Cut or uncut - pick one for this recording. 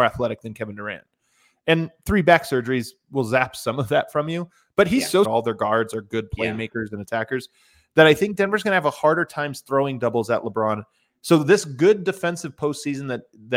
cut